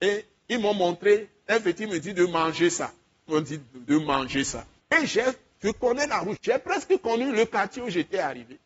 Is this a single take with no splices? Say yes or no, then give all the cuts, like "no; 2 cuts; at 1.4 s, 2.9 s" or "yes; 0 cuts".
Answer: no; 2 cuts; at 4.8 s, 6.4 s